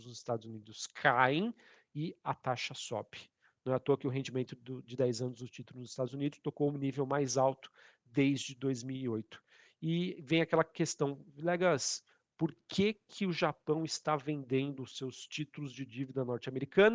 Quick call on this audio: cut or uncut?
uncut